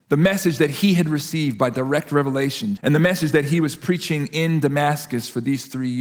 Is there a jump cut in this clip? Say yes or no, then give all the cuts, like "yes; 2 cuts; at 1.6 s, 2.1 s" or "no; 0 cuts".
yes; 1 cut; at 2.8 s